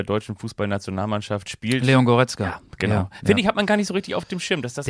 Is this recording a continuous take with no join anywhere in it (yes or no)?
yes